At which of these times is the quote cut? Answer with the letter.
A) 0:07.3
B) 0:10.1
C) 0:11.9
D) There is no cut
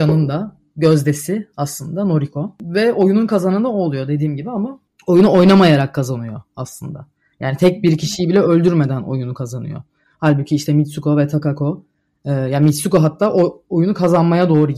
D